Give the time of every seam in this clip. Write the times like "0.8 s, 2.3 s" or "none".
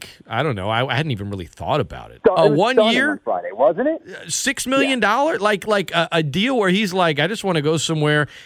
2.2 s